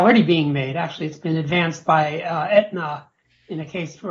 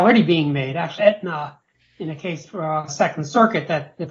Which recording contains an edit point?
second; 2 cuts; at 1.0 s, 2.9 s

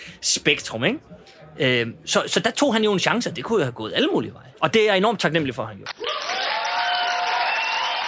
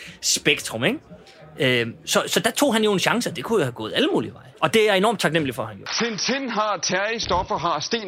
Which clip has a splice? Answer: first; 1 cut; at 5.9 s

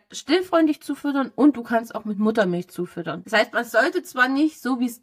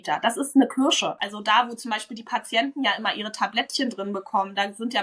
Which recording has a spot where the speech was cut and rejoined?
second; 1 cut; at 1.2 s

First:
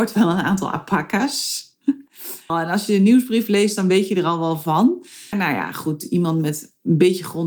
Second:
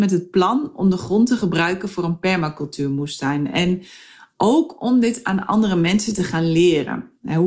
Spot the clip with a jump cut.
first; 2 cuts; at 2.5 s, 5.3 s

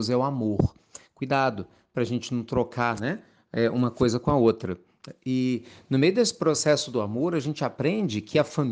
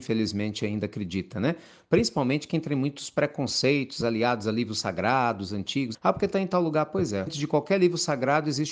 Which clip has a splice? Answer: second; 2 cuts; at 5.9 s, 7.3 s

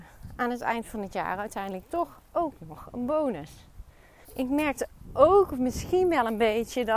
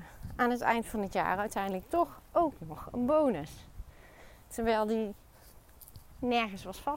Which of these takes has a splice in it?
first; 1 cut; at 4.2 s

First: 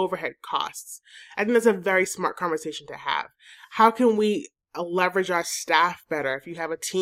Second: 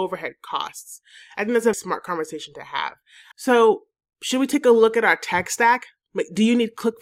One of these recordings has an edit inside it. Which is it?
second; 2 cuts; at 1.7 s, 3.3 s

